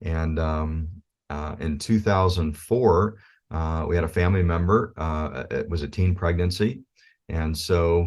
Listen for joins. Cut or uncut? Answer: uncut